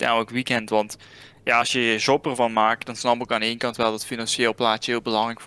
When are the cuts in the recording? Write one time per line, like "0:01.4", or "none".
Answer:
none

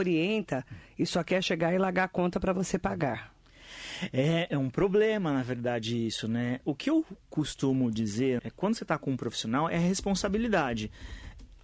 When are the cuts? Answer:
0:08.4

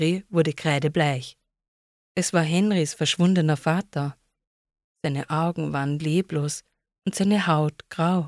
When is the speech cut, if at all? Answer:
none

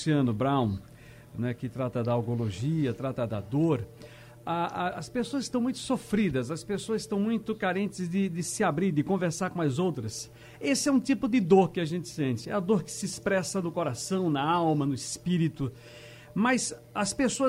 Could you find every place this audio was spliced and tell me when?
none

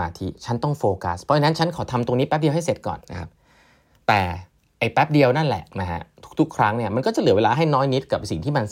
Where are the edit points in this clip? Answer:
0:03.0
0:05.7

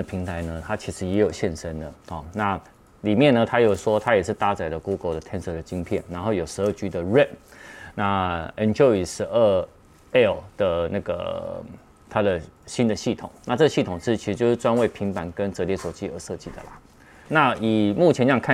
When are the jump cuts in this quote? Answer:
0:17.3

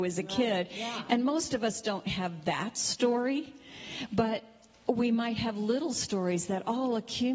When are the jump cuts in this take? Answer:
none

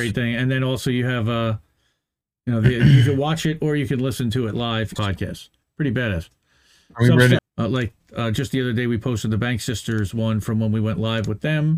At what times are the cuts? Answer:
0:05.0
0:07.4

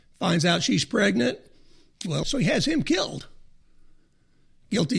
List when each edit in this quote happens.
0:02.2

